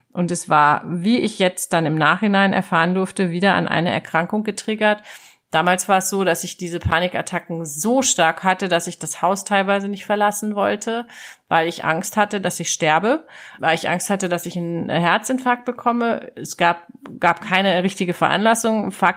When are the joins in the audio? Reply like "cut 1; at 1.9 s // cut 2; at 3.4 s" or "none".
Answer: cut 1; at 13.6 s